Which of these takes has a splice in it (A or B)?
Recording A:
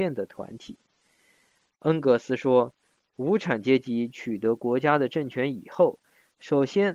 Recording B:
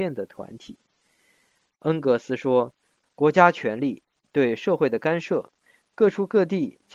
B